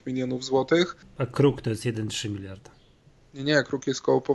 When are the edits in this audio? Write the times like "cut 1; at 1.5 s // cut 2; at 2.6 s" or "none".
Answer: cut 1; at 1.0 s